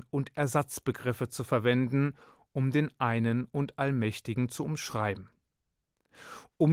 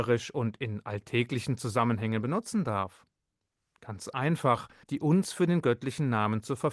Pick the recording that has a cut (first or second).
second